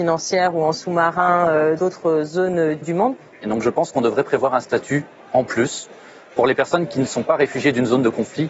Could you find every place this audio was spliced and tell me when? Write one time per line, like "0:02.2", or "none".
0:01.8
0:03.4